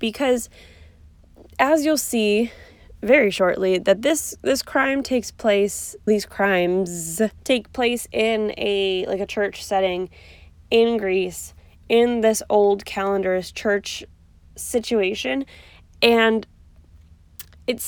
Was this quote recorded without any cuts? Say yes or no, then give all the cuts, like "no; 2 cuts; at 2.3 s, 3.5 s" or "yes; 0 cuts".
no; 2 cuts; at 6.1 s, 7.4 s